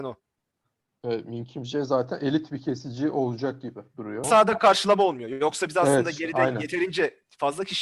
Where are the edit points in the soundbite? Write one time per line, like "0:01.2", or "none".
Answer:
0:04.2